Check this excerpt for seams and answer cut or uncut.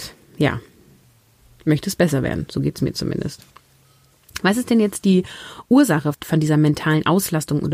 cut